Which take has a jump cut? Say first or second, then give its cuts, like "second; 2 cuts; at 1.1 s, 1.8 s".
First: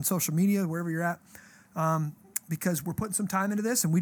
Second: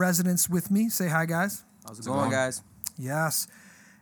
first; 1 cut; at 2.8 s